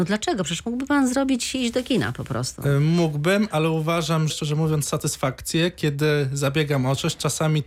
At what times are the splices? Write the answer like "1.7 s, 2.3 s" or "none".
4.3 s